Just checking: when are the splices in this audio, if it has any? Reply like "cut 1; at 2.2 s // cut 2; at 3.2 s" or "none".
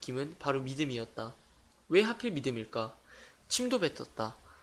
cut 1; at 3.4 s